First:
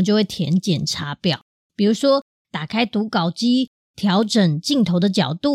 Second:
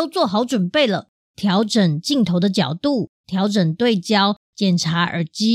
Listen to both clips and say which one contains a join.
second; 2 cuts; at 1.2 s, 3.2 s

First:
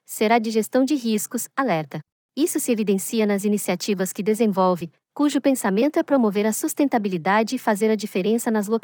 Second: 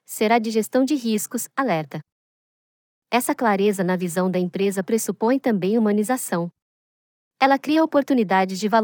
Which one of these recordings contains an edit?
first; 2 cuts; at 2.2 s, 5.0 s

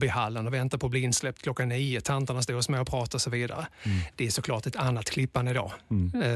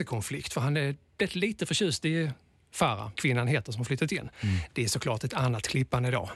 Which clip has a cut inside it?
second; 2 cuts; at 3.2 s, 4.3 s

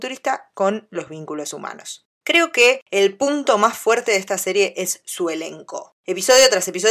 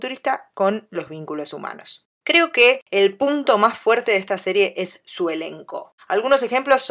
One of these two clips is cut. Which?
second; 1 cut; at 6.0 s

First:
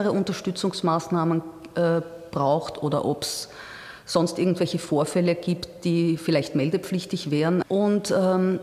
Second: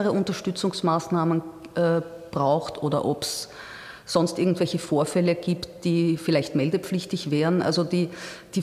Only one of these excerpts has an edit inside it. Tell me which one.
first; 1 cut; at 7.6 s

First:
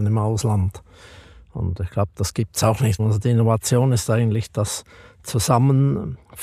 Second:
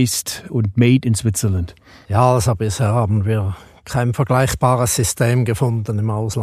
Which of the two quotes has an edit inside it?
first; 1 cut; at 3.0 s

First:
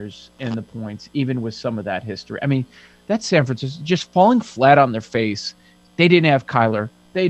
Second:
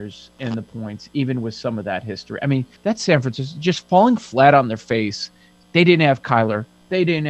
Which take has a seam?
second; 1 cut; at 2.8 s

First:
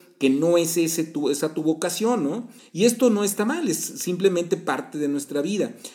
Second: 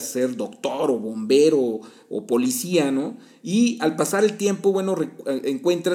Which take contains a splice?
first; 1 cut; at 2.6 s

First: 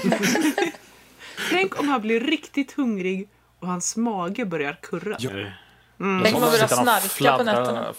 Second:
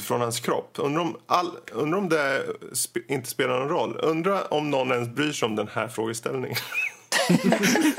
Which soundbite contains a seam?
first; 1 cut; at 5.3 s

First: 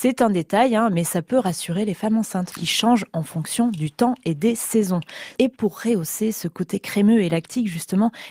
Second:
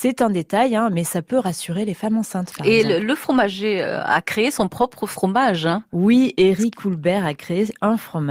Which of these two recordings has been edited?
first; 2 cuts; at 2.6 s, 5.4 s

